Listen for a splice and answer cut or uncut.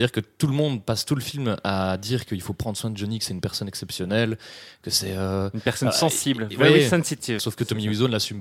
cut